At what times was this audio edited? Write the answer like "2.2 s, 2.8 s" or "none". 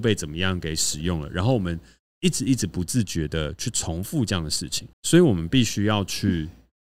3.6 s, 4.9 s